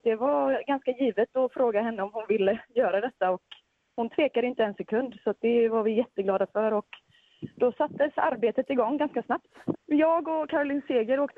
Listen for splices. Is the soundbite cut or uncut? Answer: cut